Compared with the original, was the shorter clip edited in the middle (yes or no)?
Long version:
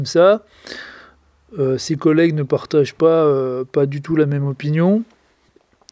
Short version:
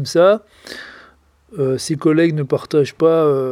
no